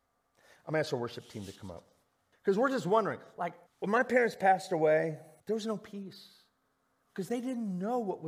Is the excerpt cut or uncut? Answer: cut